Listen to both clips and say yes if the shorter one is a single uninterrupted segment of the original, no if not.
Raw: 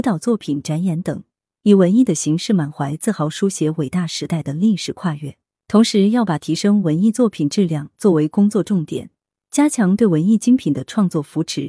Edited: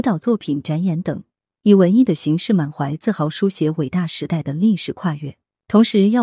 yes